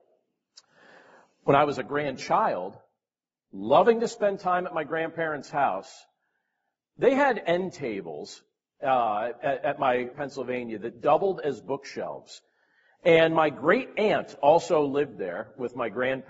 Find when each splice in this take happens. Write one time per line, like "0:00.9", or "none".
0:10.1